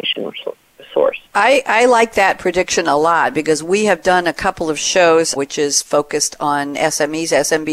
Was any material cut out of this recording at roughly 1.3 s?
yes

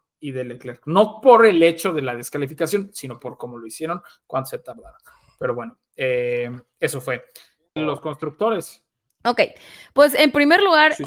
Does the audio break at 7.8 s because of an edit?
yes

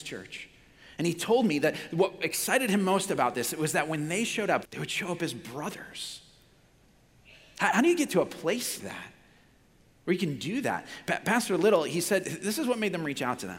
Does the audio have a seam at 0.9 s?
no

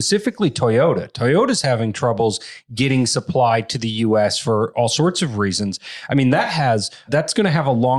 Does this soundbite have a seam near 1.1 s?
no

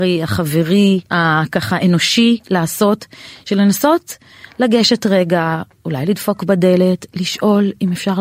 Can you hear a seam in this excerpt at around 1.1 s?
yes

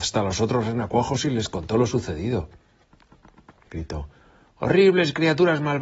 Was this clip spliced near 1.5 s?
no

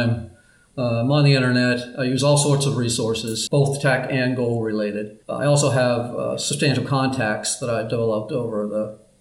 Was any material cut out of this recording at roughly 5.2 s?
yes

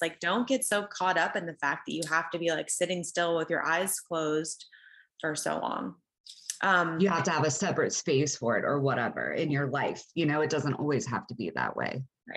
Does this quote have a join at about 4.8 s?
no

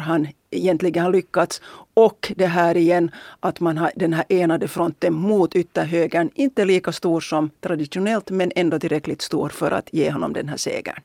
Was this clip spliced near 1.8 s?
no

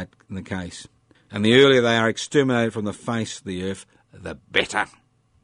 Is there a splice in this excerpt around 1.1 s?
yes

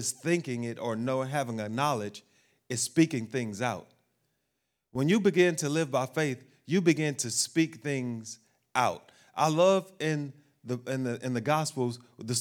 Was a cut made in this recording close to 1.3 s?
no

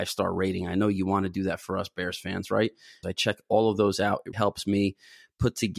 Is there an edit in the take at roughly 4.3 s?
yes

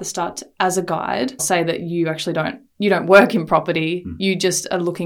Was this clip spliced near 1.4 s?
yes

